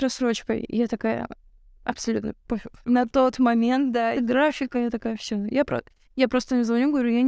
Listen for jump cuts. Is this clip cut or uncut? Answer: cut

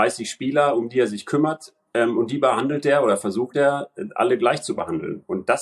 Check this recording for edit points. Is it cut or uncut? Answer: uncut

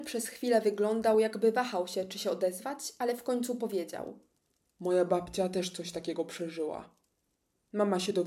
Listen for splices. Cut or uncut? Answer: uncut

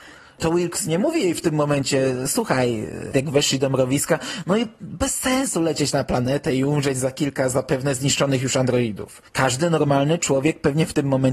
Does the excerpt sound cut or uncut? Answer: cut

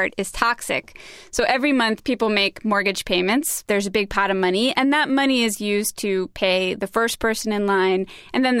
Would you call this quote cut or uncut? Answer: uncut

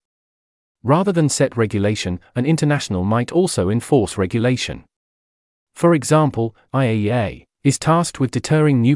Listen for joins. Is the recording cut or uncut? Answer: cut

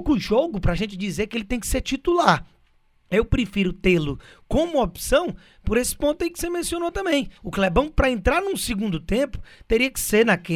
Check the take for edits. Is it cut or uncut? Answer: cut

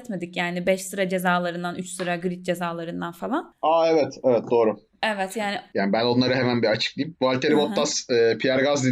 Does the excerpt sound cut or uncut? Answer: uncut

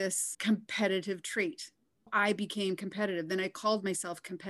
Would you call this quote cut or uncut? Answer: uncut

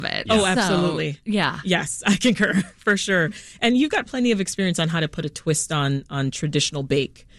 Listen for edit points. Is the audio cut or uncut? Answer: uncut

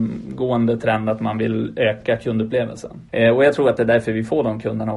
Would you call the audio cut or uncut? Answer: cut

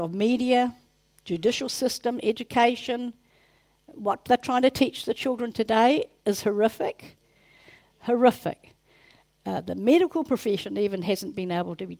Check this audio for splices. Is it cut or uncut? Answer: uncut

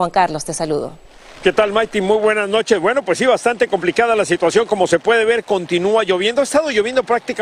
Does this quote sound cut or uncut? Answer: uncut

